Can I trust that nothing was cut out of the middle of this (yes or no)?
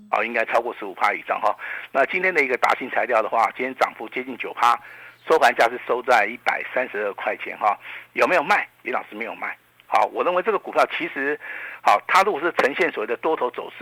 yes